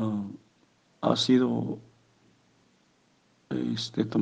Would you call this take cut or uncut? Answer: uncut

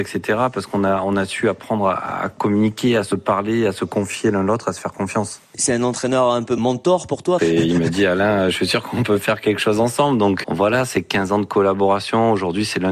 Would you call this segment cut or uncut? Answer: cut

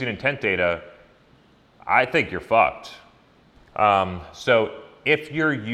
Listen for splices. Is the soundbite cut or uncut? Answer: cut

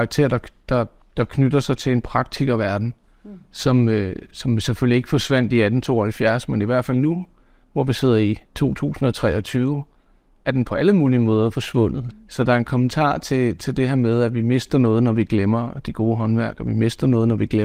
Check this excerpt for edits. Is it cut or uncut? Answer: cut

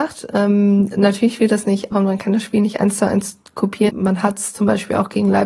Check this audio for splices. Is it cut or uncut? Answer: cut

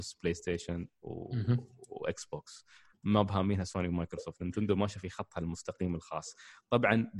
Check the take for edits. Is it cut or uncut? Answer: uncut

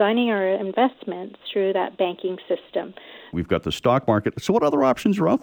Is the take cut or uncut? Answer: cut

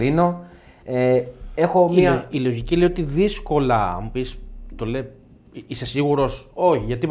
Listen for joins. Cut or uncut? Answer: uncut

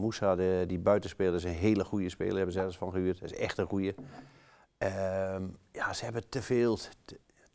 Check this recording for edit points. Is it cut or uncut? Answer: uncut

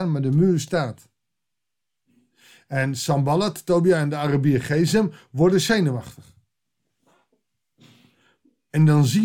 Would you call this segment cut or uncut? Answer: uncut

